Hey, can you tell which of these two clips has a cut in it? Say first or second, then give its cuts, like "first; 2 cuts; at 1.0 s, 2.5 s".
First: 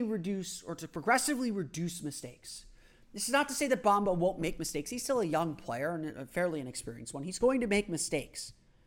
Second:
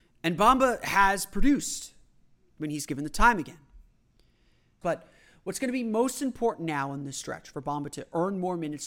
second; 1 cut; at 4.8 s